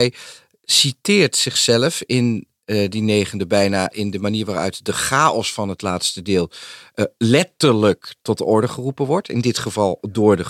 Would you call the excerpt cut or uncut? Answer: uncut